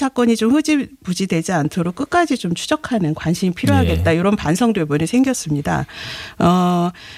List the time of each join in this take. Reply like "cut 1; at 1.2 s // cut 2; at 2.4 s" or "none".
none